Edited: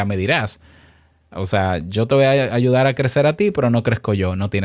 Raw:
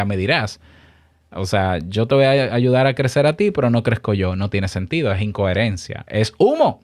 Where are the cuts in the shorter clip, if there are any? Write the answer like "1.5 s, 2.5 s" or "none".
none